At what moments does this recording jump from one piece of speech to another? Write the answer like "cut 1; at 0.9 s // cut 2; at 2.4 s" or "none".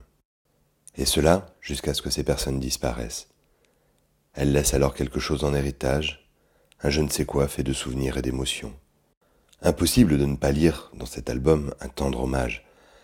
none